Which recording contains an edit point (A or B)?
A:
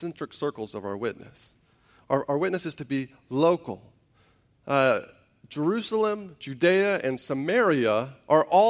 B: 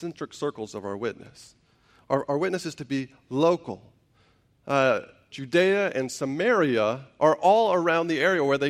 B